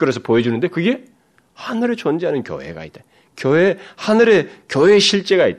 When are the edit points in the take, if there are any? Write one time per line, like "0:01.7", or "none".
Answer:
none